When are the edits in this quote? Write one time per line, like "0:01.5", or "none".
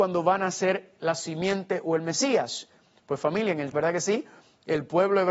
0:03.7